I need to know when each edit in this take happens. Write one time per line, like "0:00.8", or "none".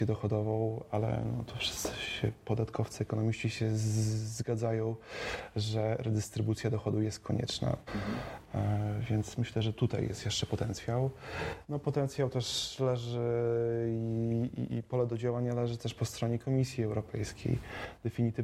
0:07.9
0:14.7